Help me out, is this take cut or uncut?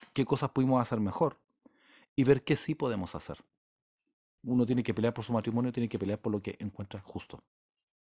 cut